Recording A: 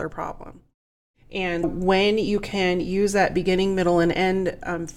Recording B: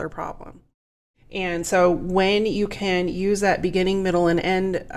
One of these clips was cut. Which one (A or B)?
A